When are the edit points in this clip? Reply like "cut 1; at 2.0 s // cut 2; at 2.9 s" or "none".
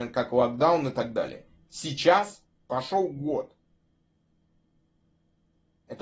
none

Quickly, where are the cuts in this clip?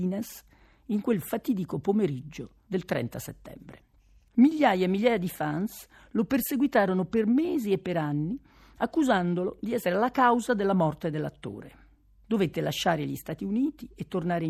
cut 1; at 4.3 s

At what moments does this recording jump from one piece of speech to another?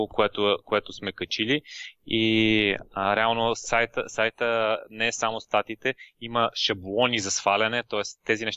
none

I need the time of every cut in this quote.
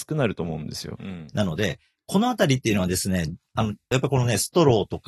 cut 1; at 1.0 s // cut 2; at 3.9 s

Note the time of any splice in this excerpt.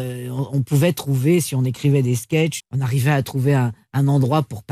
cut 1; at 2.6 s

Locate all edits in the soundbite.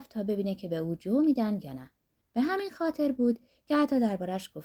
cut 1; at 2.2 s

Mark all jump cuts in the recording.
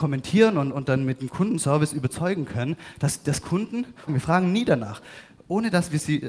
cut 1; at 4.1 s

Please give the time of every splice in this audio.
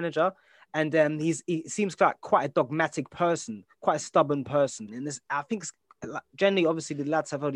cut 1; at 4.9 s

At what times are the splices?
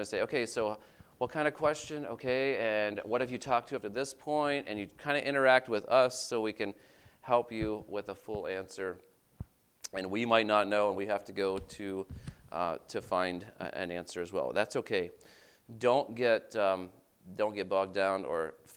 none

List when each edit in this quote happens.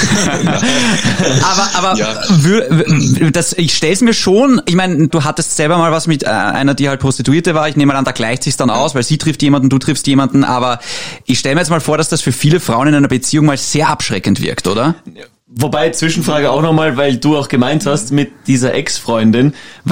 cut 1; at 5.1 s

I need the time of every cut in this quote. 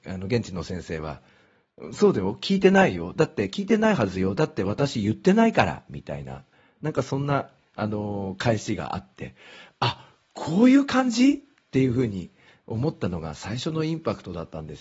none

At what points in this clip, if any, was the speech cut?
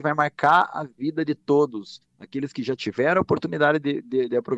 none

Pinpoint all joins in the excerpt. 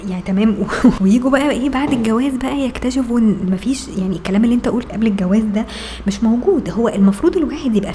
cut 1; at 1.0 s // cut 2; at 4.9 s

